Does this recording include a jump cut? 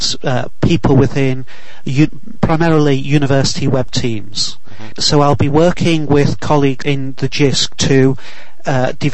yes; 2 cuts; at 4.9 s, 6.8 s

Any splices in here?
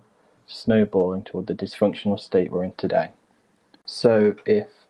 yes; 1 cut; at 3.8 s

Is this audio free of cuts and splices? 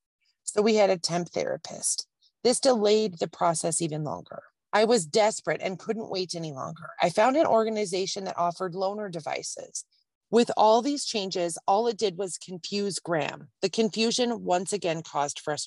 no; 1 cut; at 10.2 s

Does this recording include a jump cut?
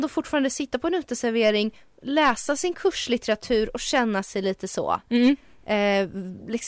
no; 0 cuts

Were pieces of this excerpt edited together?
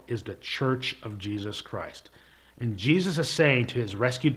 no; 0 cuts

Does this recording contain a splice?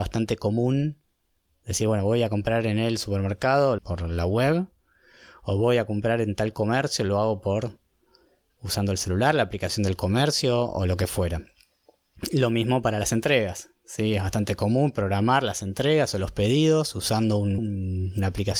yes; 2 cuts; at 3.8 s, 17.6 s

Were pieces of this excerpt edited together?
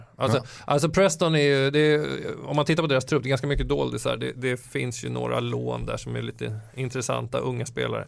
no; 0 cuts

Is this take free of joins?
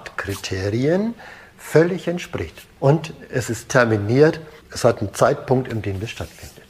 no; 2 cuts; at 2.8 s, 4.6 s

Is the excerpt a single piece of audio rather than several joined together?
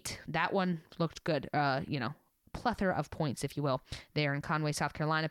yes; 0 cuts

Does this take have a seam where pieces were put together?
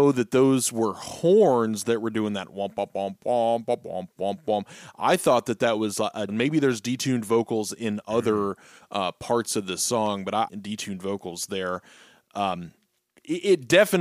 yes; 2 cuts; at 6.3 s, 10.5 s

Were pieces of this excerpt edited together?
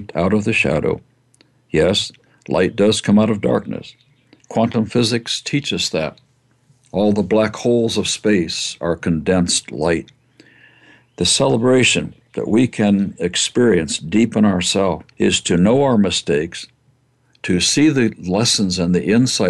yes; 1 cut; at 15.1 s

